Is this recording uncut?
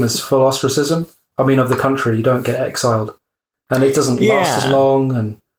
yes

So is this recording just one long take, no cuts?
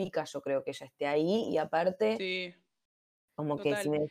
no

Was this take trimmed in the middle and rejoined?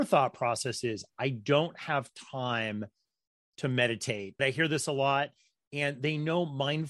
yes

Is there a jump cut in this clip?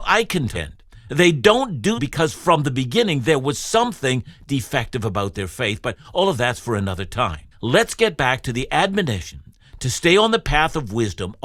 yes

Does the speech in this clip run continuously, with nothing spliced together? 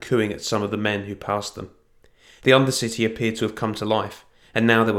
no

